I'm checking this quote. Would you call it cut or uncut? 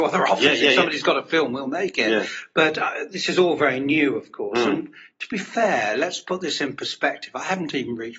uncut